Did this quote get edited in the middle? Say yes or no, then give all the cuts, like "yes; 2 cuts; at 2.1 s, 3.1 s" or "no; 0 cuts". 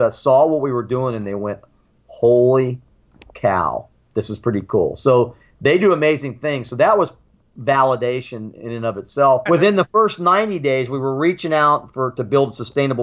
yes; 1 cut; at 9.5 s